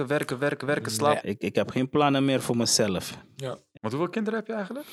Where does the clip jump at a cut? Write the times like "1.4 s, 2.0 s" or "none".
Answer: 1.2 s, 3.8 s